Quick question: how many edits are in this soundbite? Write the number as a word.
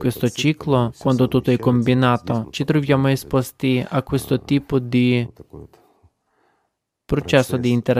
zero